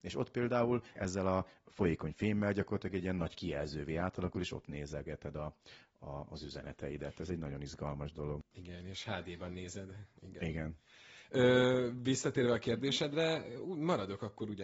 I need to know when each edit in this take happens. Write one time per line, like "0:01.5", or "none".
0:01.0